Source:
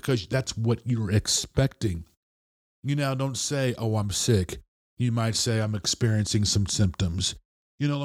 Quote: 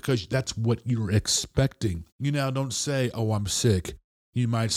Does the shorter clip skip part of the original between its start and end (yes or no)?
yes